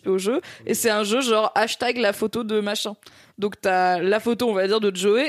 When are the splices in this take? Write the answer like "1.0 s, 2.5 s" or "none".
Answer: none